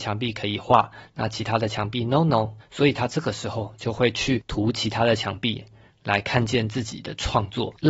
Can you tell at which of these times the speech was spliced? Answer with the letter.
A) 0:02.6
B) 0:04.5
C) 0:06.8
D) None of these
A